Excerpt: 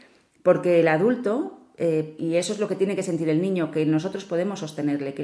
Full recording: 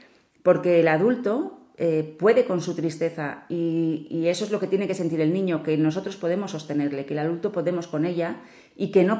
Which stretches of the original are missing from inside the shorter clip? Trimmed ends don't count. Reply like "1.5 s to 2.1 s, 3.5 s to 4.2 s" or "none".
2.2 s to 4.1 s